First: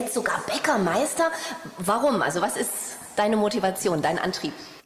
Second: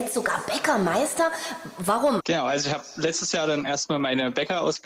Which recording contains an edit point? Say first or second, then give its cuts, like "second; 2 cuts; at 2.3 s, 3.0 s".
second; 1 cut; at 2.2 s